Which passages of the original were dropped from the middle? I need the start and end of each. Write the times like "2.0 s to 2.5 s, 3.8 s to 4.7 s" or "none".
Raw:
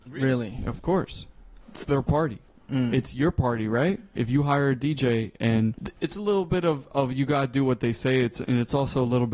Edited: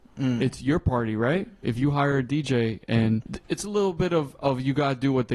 none